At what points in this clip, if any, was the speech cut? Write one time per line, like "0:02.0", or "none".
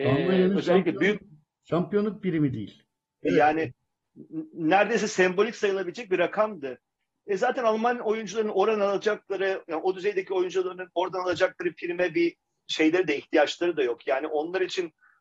0:03.2